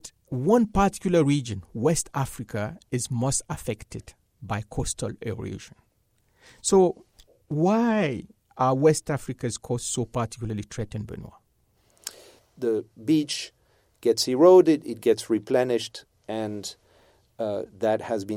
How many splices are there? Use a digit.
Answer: 1